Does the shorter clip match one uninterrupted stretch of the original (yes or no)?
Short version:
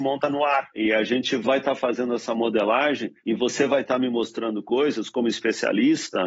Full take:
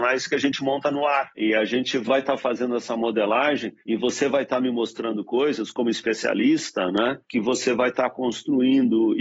yes